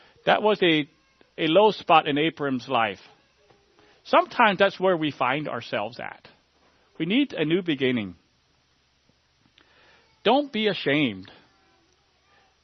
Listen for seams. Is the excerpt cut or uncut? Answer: cut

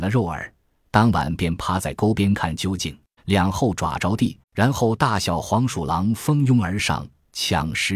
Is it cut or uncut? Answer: cut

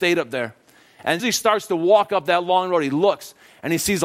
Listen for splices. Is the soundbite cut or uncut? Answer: cut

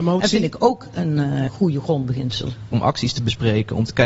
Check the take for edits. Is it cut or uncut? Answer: cut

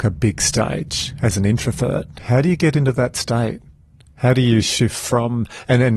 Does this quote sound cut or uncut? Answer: uncut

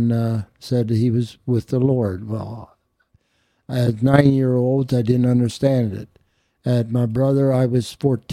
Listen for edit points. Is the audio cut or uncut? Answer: uncut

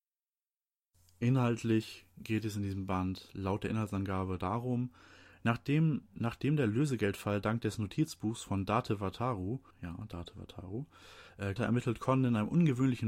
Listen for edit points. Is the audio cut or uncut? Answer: cut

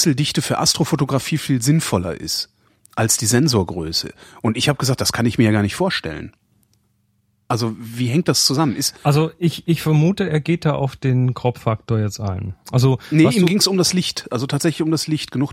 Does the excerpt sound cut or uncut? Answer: uncut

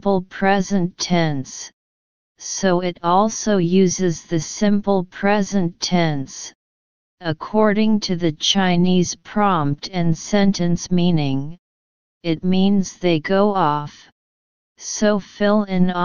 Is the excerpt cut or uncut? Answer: uncut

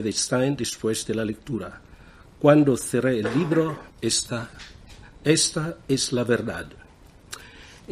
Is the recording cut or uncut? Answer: cut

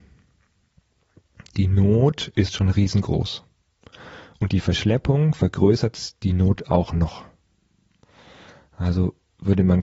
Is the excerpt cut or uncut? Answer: uncut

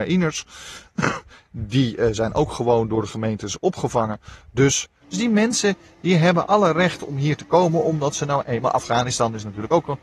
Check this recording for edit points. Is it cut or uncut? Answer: cut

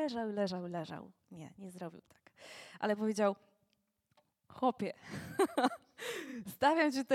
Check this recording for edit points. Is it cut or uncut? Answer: uncut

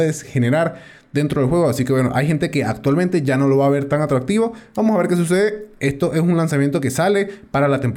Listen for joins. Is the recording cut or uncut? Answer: uncut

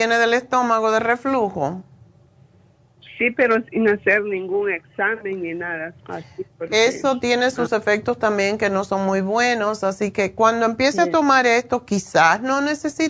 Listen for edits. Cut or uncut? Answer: cut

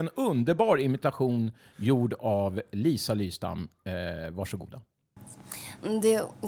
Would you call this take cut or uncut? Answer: uncut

